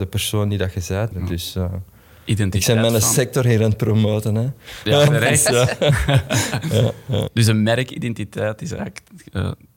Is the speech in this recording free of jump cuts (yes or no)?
no